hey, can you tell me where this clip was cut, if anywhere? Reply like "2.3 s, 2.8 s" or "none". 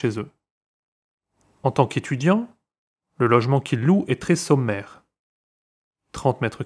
none